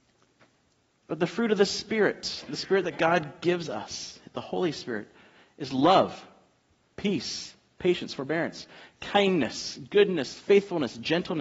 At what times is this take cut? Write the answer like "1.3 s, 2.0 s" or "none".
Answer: 6.9 s